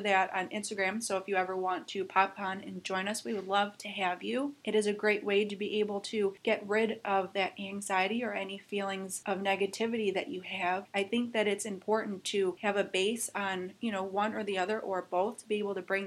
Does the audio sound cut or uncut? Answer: uncut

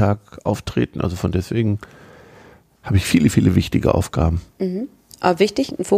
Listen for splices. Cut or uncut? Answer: uncut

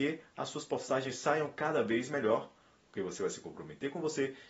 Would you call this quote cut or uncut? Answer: cut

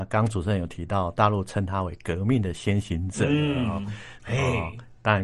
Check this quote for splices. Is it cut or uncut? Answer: cut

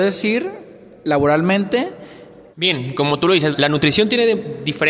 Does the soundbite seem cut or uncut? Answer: cut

